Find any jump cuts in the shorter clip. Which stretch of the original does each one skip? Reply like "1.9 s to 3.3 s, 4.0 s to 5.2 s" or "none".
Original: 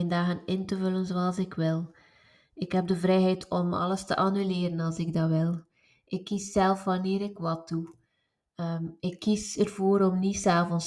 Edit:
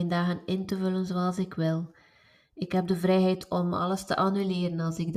none